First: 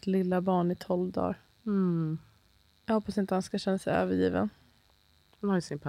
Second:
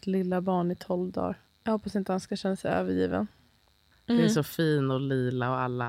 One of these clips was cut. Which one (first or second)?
second